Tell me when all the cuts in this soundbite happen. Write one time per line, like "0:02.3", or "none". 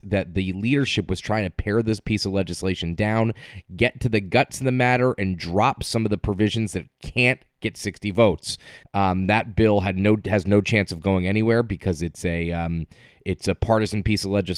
0:08.8